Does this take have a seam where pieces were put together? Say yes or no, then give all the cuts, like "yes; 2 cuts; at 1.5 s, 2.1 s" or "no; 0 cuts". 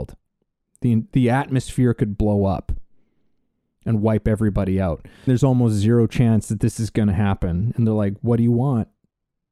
yes; 1 cut; at 5.3 s